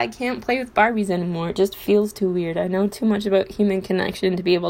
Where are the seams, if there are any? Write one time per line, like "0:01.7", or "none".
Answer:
none